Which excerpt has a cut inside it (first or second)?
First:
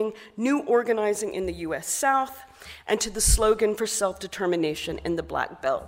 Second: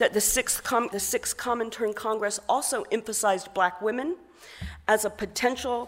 second